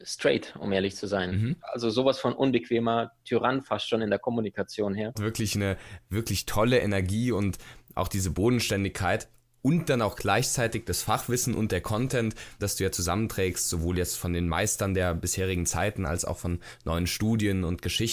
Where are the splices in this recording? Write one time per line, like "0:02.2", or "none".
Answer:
0:01.6
0:05.1
0:12.6